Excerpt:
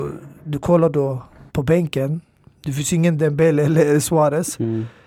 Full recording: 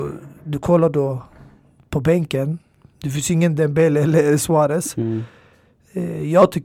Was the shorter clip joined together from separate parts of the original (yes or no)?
yes